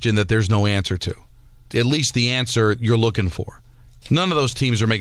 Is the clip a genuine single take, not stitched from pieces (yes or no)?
no